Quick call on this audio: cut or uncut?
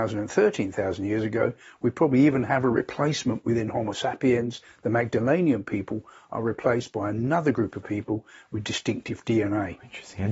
uncut